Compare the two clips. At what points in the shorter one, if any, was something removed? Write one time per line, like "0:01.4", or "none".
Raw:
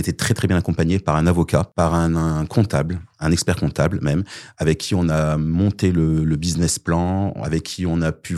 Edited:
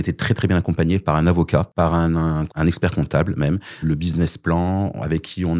0:02.5
0:03.8